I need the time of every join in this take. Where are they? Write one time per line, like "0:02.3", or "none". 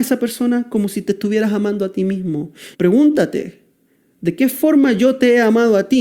0:02.7